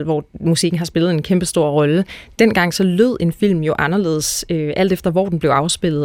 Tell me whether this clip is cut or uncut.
uncut